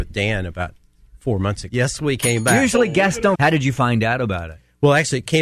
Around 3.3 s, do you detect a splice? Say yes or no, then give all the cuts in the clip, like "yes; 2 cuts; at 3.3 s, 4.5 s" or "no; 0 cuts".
yes; 2 cuts; at 1.7 s, 3.3 s